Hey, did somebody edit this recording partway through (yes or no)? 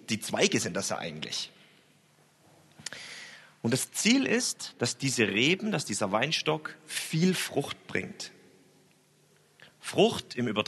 no